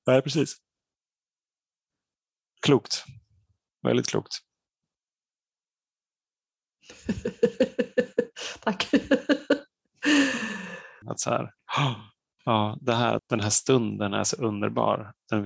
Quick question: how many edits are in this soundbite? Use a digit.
2